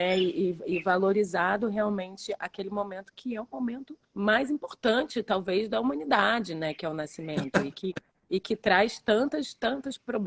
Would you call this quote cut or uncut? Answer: cut